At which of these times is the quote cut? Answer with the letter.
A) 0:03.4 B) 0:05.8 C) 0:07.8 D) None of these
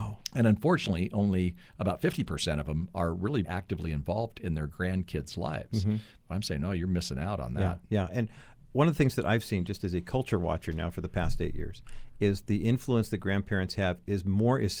A